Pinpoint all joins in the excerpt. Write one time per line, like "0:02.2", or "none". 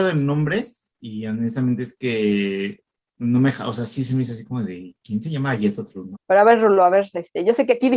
0:06.1